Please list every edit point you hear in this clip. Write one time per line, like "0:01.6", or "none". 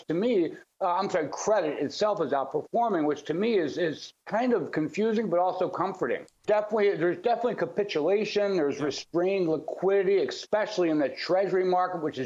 0:06.4